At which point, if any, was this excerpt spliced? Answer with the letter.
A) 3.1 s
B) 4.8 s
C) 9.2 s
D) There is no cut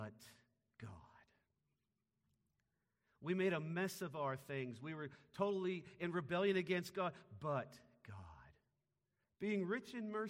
C